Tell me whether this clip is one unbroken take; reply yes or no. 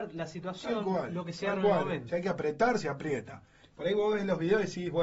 no